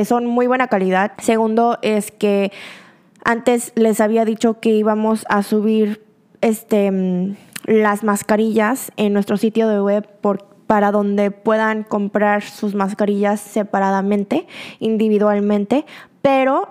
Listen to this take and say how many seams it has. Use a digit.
1